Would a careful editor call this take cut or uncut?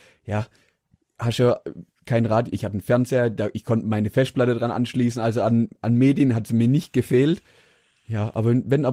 uncut